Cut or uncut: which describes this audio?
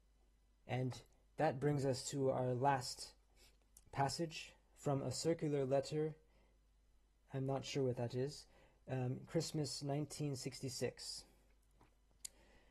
uncut